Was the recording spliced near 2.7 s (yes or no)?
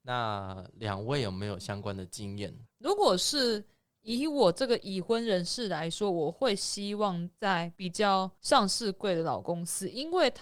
yes